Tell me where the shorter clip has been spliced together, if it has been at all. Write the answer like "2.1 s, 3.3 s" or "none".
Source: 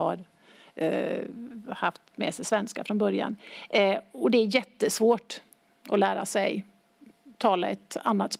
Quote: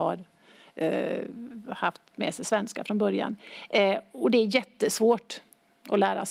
none